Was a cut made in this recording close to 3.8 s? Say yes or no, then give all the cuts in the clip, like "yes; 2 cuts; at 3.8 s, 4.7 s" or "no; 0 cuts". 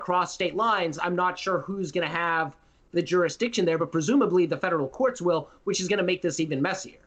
no; 0 cuts